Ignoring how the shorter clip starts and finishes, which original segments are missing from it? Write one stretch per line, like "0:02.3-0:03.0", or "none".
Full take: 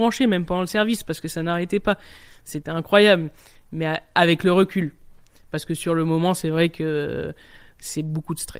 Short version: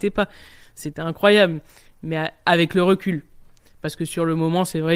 none